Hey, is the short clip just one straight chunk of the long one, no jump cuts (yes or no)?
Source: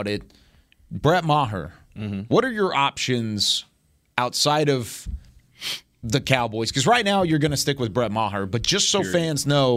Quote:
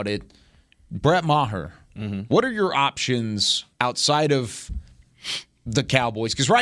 no